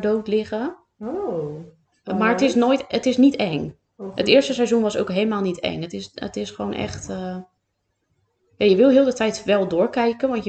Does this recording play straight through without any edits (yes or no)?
yes